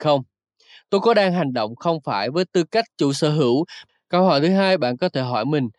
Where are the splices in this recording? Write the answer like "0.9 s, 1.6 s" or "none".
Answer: none